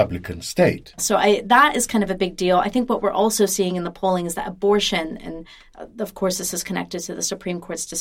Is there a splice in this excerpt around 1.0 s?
yes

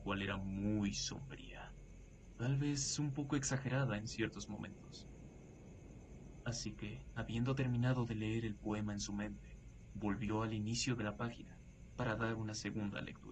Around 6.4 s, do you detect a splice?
yes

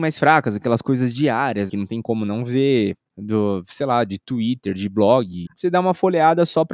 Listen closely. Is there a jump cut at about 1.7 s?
yes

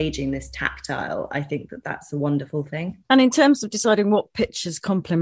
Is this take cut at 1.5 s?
no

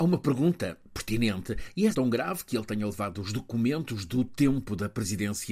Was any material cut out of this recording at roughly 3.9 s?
no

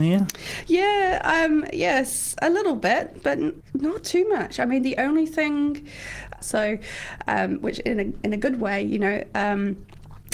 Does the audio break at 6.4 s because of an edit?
yes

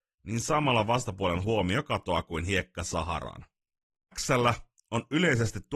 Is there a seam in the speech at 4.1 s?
yes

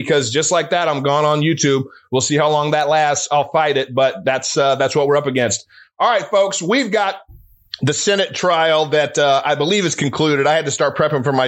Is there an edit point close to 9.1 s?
no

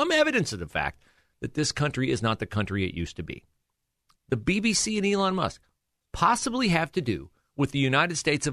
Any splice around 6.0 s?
yes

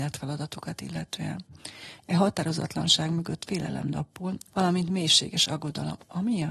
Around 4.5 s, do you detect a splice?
yes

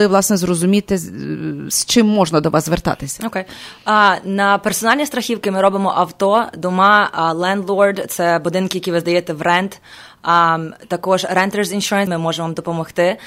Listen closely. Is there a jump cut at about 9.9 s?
no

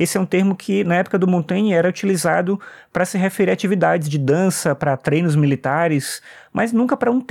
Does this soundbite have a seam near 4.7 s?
no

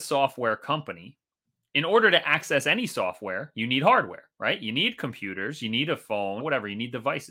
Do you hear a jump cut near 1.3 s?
no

